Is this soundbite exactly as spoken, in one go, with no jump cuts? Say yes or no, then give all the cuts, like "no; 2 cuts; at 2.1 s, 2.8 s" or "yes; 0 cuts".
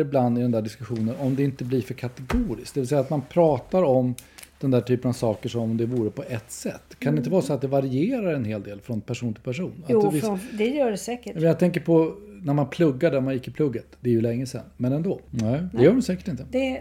no; 1 cut; at 15.3 s